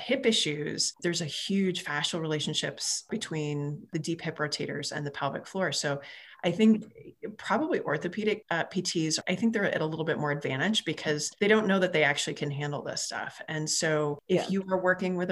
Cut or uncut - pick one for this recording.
uncut